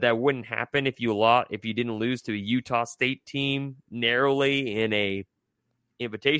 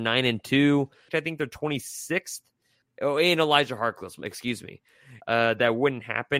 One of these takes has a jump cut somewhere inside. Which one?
second; 3 cuts; at 1.1 s, 2.8 s, 5.2 s

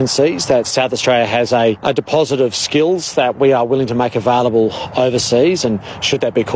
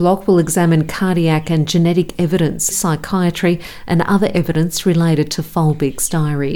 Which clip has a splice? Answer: second; 1 cut; at 2.7 s

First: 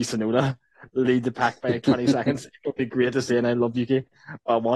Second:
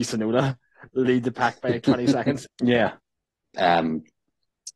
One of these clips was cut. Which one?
second; 1 cut; at 2.5 s

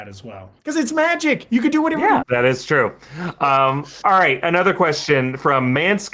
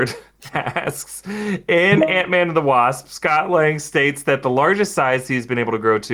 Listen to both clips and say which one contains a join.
first; 1 cut; at 2.2 s

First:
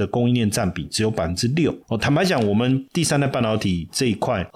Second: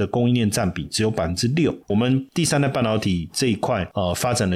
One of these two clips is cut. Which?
second; 1 cut; at 1.9 s

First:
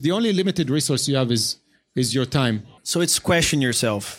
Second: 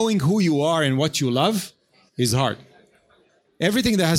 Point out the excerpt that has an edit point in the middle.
first; 1 cut; at 2.8 s

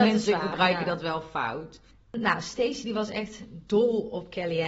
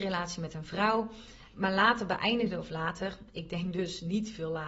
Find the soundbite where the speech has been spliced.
first; 1 cut; at 2.0 s

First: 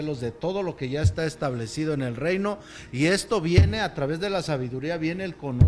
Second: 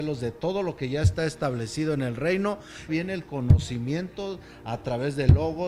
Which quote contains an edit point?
second; 1 cut; at 2.9 s

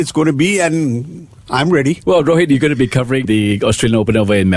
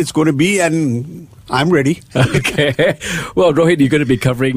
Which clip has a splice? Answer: first; 2 cuts; at 2.0 s, 3.2 s

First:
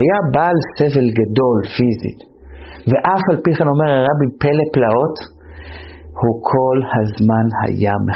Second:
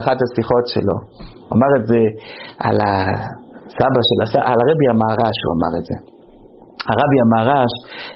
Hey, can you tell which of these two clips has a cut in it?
second; 1 cut; at 4.4 s

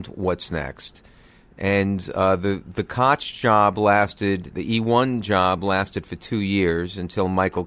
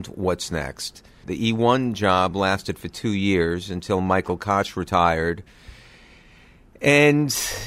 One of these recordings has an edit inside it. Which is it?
second; 1 cut; at 1.2 s

